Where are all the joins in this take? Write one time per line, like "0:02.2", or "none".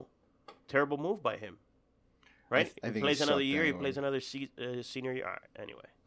none